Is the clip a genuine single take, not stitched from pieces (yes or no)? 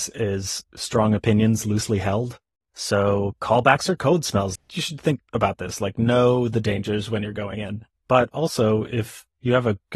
no